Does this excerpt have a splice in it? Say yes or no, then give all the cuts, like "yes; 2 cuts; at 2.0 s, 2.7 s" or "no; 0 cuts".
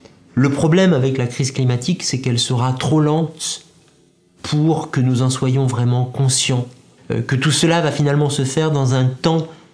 yes; 1 cut; at 7.0 s